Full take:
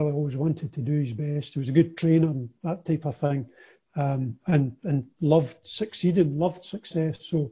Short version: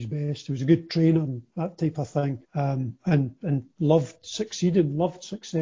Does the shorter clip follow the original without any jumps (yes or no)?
no